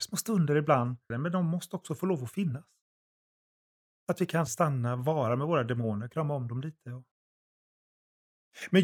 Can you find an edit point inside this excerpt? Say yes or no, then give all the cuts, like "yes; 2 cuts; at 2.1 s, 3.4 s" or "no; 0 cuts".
yes; 2 cuts; at 1.1 s, 4.5 s